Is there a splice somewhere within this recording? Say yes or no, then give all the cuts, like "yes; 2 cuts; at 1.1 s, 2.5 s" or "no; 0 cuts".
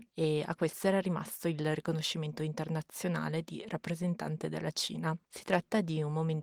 no; 0 cuts